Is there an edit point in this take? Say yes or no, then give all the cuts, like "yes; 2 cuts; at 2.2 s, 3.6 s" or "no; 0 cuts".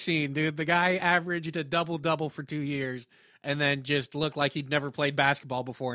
no; 0 cuts